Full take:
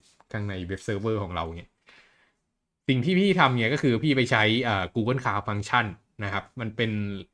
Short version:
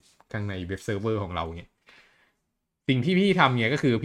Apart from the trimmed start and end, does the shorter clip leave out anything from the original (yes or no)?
no